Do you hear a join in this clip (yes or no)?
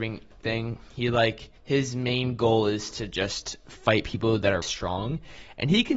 yes